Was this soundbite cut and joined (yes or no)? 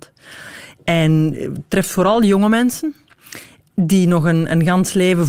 no